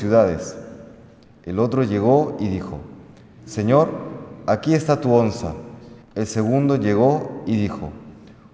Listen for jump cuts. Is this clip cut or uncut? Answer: cut